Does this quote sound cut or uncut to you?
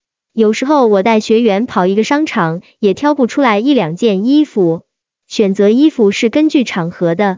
cut